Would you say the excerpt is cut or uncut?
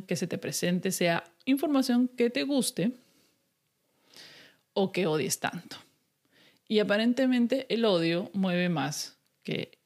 uncut